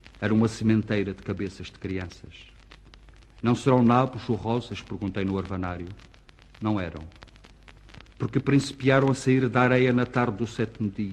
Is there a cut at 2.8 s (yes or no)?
no